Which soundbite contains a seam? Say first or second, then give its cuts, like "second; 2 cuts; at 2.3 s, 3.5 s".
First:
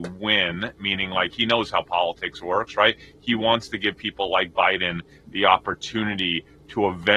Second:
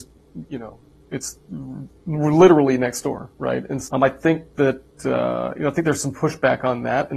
second; 1 cut; at 3.9 s